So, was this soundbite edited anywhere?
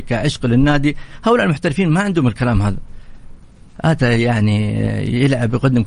no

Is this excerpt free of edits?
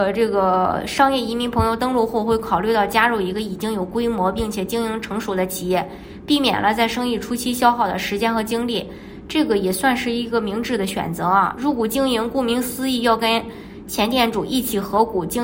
yes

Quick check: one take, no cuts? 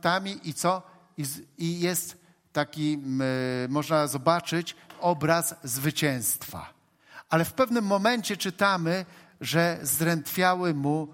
yes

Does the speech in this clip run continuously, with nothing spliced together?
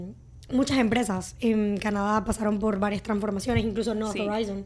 yes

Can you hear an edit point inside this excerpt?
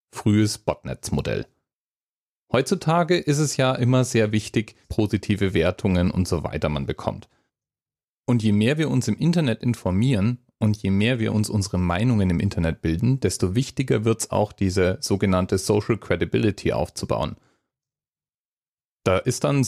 yes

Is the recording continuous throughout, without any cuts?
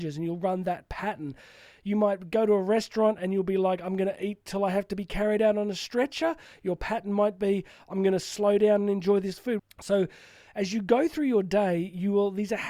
no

